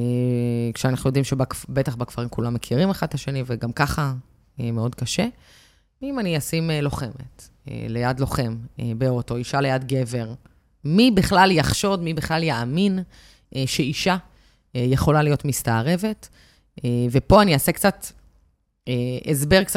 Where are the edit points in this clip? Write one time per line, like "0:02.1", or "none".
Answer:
none

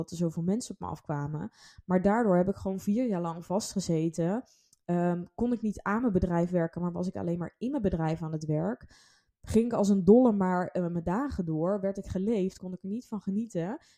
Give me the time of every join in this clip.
0:12.6

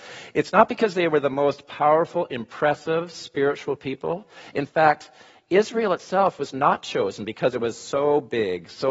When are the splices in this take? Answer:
none

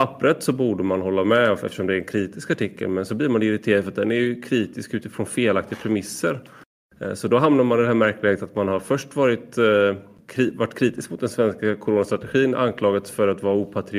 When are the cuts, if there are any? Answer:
none

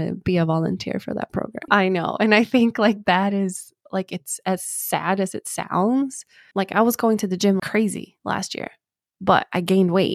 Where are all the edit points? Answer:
0:01.7
0:06.5
0:07.6

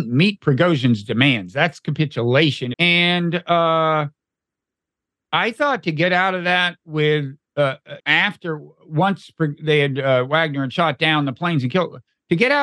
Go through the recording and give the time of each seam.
0:02.7
0:08.0

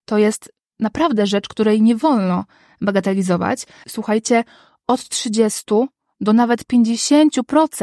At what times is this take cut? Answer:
0:03.8

